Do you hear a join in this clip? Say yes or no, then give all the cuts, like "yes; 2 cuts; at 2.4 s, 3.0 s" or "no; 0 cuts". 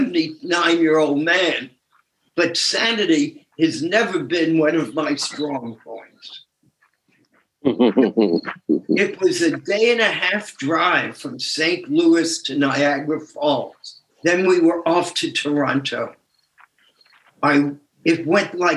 yes; 1 cut; at 14.1 s